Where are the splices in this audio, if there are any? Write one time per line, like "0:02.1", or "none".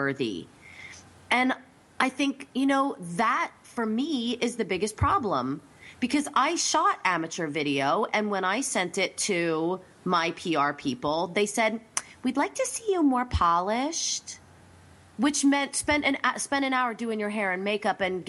none

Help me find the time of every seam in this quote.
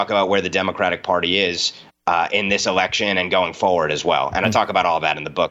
none

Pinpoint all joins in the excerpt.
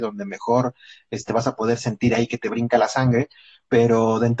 none

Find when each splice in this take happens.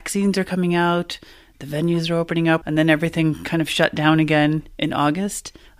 0:02.6

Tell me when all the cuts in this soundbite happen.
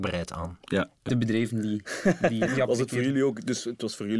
0:01.1
0:02.5

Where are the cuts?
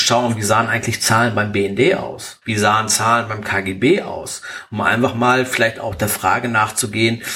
0:02.4

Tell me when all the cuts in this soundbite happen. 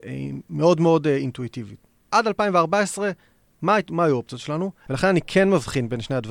0:02.1
0:04.9

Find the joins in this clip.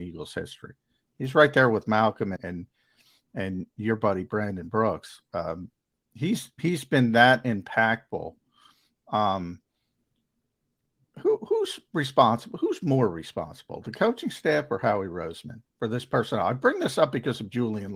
0:02.4

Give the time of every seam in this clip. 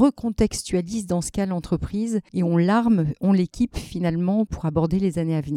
0:04.5

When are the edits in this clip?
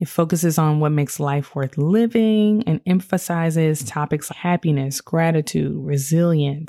0:04.3

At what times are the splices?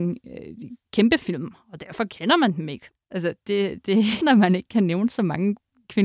0:02.9
0:04.2

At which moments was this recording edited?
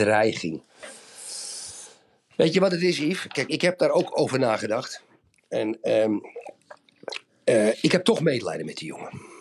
none

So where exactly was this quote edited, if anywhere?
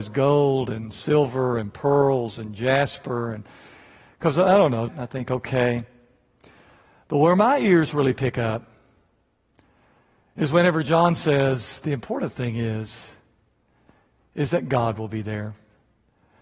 0:04.9

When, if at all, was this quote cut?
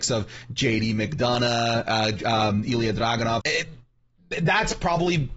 0:02.2
0:03.4

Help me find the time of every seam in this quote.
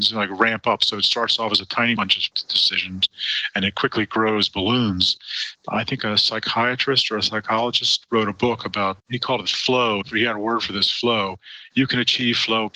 0:05.5
0:09.0

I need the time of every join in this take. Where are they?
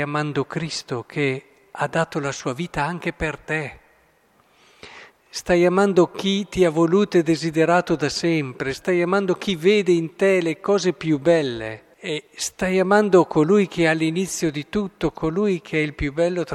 0:08.7
0:11.9

